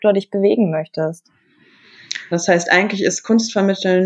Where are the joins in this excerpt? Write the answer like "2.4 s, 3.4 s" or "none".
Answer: 2.3 s